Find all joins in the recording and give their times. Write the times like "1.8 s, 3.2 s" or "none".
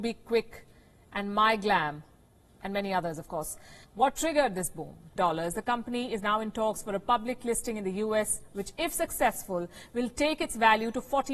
3.8 s, 5.2 s